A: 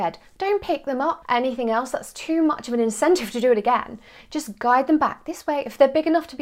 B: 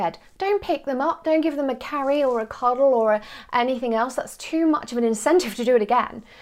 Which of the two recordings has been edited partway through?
A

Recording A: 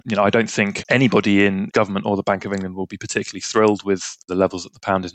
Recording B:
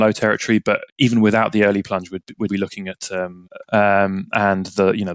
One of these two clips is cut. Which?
B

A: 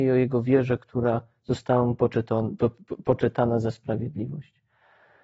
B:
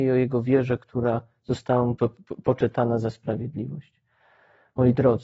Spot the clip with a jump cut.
B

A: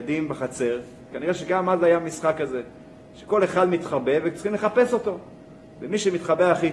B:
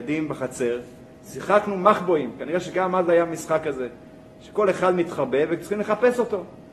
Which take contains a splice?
A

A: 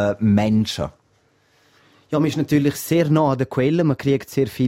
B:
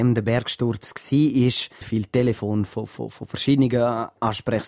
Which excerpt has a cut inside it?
B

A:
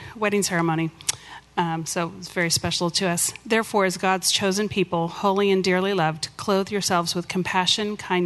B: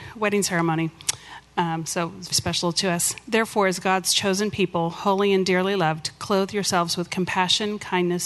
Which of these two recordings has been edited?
B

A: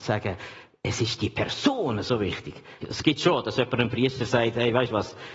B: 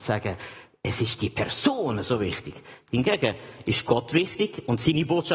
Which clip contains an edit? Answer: A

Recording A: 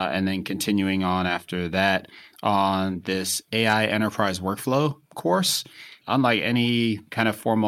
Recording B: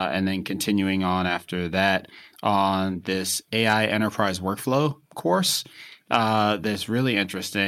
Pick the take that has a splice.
A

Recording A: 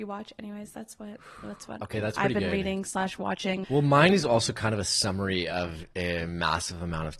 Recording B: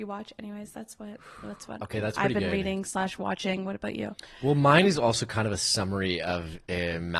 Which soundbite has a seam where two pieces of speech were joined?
A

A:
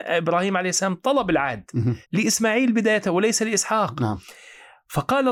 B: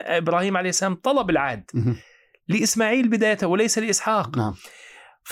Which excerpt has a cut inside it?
A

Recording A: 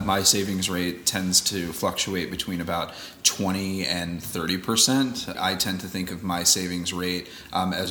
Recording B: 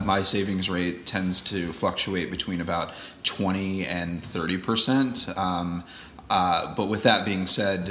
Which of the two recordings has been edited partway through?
A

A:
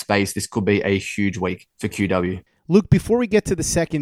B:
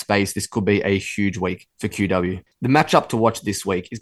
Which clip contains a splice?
B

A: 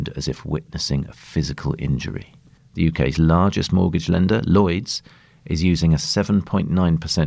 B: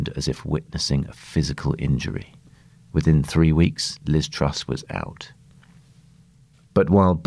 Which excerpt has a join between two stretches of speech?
A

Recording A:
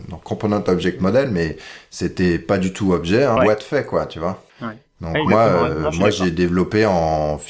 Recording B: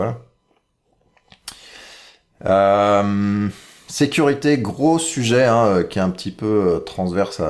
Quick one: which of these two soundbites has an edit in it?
A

